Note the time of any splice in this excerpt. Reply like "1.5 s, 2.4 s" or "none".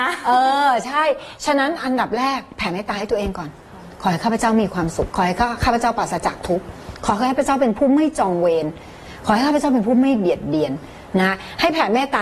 5.1 s